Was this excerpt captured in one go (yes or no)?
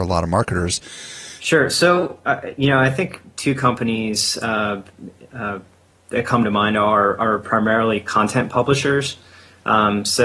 no